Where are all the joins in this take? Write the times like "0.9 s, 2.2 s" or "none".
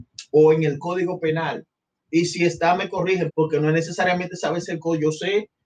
3.3 s